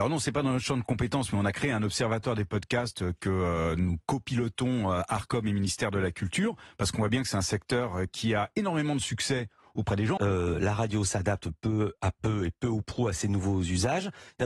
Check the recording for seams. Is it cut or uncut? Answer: cut